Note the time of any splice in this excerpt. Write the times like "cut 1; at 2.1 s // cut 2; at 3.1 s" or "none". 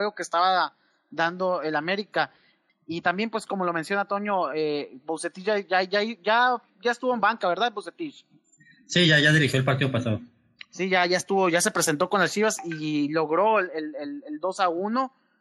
cut 1; at 2.7 s